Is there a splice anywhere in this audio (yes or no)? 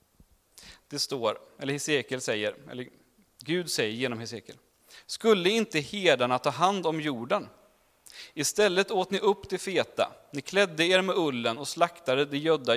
no